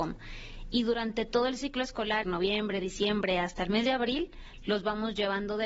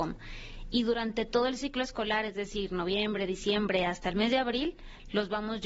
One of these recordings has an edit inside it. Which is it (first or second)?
first